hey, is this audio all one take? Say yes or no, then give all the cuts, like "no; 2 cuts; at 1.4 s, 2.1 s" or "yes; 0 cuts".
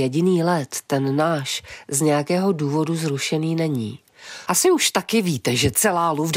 no; 1 cut; at 4.5 s